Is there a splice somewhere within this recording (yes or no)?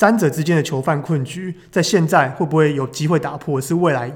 no